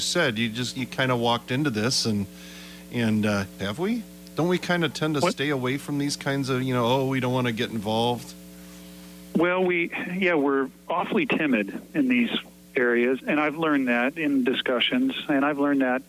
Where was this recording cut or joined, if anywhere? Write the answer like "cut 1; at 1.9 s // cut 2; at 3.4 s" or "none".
cut 1; at 3.6 s // cut 2; at 13.2 s